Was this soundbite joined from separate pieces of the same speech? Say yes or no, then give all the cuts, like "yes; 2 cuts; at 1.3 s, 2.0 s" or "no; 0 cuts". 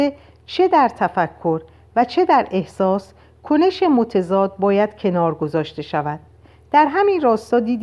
no; 0 cuts